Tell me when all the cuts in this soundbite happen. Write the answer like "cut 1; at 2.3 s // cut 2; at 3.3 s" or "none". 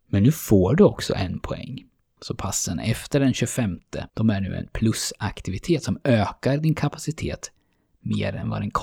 cut 1; at 2.2 s // cut 2; at 4.1 s